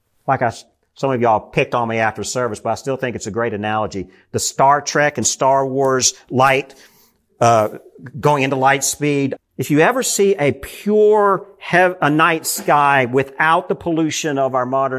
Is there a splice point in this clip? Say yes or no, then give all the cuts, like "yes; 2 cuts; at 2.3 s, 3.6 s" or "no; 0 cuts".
yes; 1 cut; at 9.4 s